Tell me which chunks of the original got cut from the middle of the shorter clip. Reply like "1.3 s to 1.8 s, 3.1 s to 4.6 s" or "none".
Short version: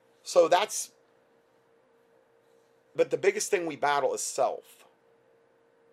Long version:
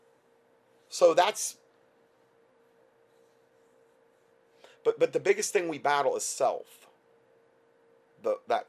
3.6 s to 5.0 s

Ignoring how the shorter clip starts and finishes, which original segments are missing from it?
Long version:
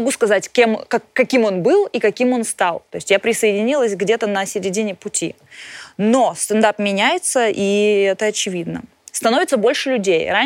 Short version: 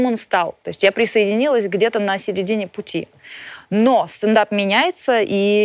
none

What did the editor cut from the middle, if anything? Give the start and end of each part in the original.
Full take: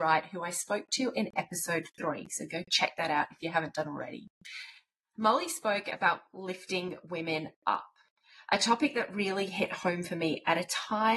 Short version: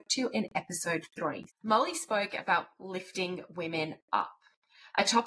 2.3 s to 5.0 s

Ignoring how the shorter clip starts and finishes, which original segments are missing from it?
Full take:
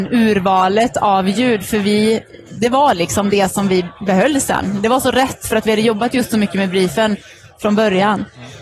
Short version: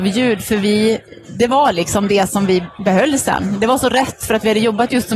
none

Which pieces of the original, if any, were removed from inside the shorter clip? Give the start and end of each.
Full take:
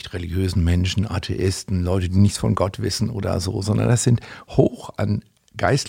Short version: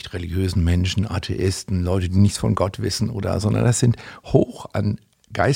3.4 s to 3.6 s

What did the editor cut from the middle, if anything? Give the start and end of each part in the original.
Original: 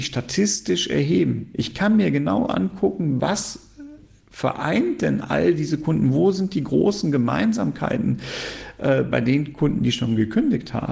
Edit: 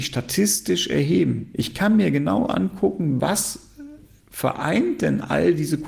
none

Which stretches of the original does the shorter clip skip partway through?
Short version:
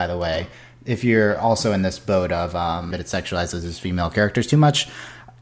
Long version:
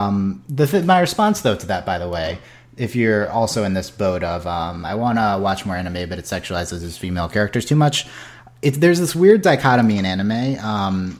4.8 s to 6.1 s

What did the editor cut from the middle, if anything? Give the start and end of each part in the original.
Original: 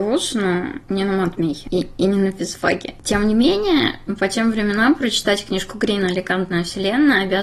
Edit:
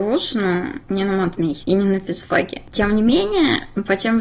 1.6 s to 2.0 s

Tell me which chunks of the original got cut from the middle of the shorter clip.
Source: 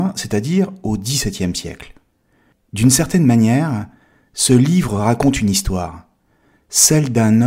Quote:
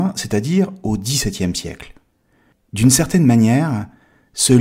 none

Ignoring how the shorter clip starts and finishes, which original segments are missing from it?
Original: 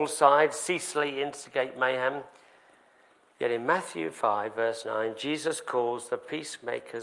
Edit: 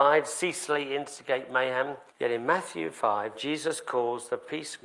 2.4 s to 3.3 s, 4.5 s to 5.1 s

